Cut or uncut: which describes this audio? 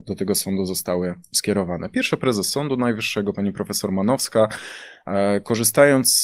uncut